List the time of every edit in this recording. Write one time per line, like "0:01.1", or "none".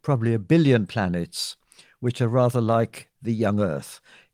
none

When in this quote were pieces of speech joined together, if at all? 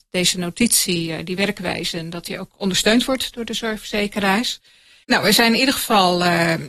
0:05.0

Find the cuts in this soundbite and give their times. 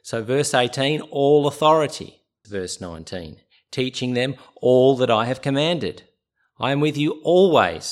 0:02.4

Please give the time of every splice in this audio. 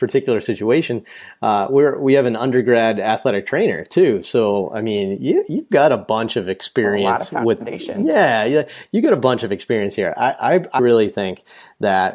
0:10.8

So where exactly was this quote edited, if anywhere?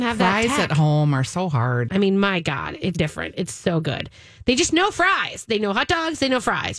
0:01.9
0:02.9

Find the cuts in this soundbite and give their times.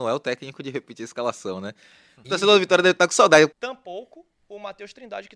0:02.2
0:03.5

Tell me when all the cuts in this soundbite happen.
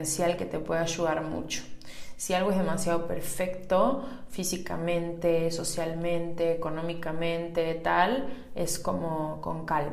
none

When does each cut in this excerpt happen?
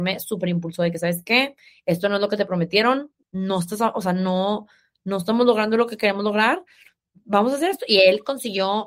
none

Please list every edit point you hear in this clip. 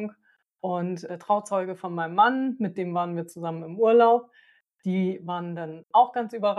0:01.1

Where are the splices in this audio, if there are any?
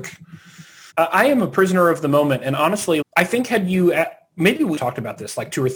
0:00.9
0:03.0
0:04.8

